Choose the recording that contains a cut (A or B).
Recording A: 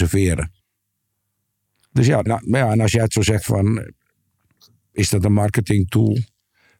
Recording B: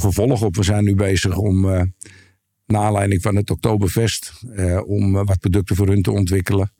A